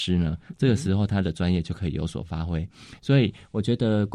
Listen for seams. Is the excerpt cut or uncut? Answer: uncut